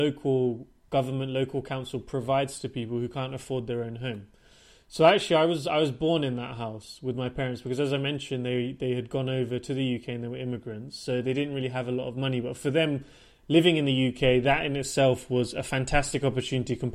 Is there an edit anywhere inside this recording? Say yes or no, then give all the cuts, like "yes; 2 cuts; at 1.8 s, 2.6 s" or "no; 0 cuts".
no; 0 cuts